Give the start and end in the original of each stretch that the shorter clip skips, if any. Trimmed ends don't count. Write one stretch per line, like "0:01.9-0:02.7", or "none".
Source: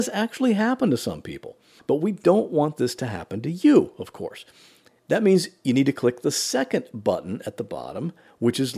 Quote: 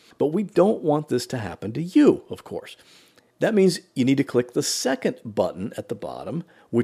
none

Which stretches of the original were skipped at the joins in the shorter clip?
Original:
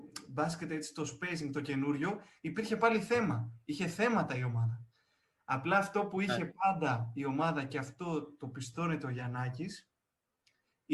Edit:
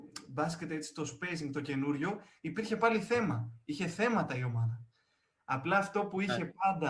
none

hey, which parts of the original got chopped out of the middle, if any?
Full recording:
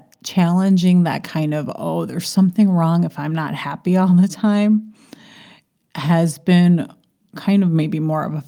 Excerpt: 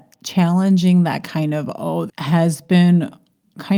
0:02.1-0:05.8

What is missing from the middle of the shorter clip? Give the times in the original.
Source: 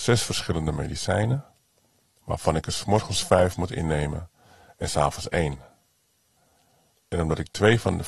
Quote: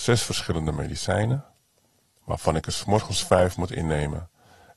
none

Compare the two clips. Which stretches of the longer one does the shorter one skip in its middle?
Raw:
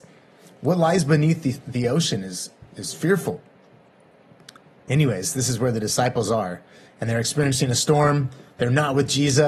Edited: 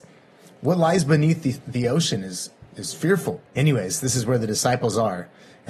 0:03.5-0:04.8

